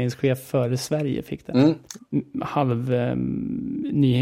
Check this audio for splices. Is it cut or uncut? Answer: cut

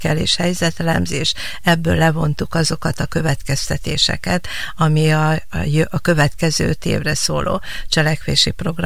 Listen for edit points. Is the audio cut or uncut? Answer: uncut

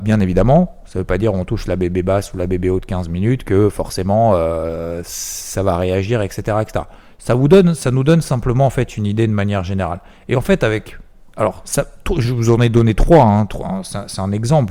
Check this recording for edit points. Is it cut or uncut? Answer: uncut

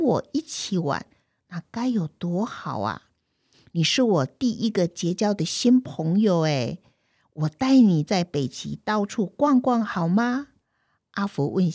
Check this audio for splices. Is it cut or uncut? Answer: uncut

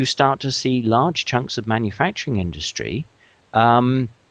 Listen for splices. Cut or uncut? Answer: uncut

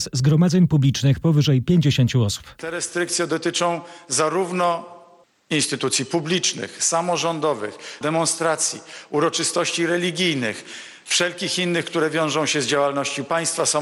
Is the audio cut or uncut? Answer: cut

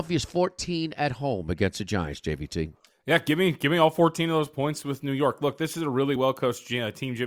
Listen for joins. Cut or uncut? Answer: uncut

